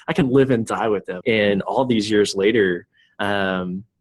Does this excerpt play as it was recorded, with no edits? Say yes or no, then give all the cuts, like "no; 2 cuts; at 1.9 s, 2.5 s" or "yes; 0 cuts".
no; 1 cut; at 1.2 s